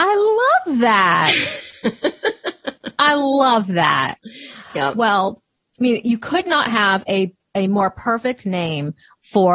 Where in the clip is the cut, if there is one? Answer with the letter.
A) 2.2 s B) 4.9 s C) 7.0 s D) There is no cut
D